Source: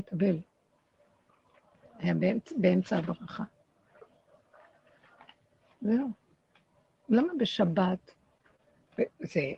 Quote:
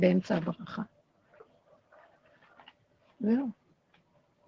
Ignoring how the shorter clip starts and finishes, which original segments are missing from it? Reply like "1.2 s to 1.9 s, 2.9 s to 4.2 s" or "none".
none